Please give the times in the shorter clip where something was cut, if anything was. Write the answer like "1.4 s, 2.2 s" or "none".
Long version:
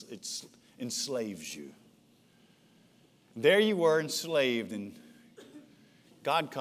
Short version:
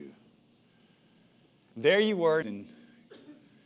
2.4 s